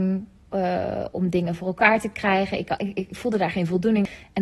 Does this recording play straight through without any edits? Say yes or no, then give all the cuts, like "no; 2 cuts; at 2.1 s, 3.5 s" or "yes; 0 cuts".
yes; 0 cuts